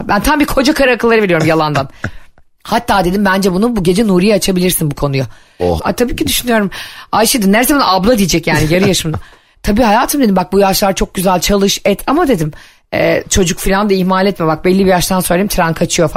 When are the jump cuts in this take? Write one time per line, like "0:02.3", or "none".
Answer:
0:05.8